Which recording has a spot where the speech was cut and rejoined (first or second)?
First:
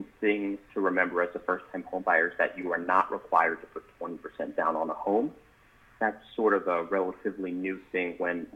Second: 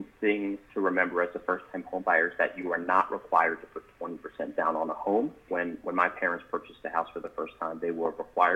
second